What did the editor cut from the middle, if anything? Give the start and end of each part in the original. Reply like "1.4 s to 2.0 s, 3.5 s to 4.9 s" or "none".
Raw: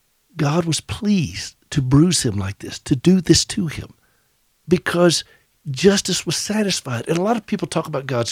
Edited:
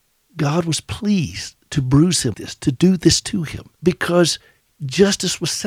2.3 s to 2.6 s, 4.0 s to 4.6 s